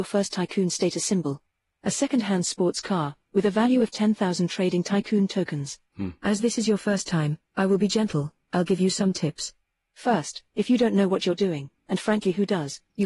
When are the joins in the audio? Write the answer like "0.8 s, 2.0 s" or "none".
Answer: none